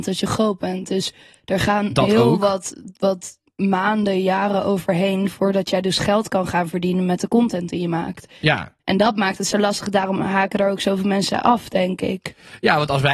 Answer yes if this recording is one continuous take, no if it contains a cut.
yes